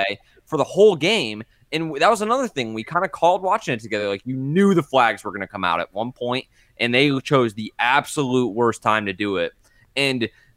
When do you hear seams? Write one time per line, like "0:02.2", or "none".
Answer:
none